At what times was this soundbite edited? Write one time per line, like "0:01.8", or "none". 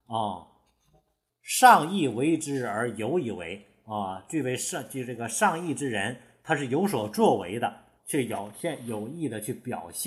0:01.3
0:08.0